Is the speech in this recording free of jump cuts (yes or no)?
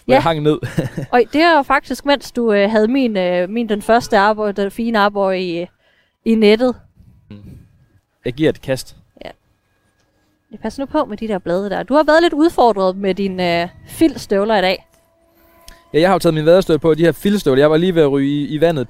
no